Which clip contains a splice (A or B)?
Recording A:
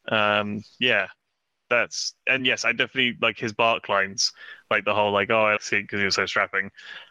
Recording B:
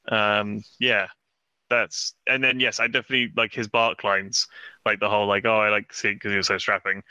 A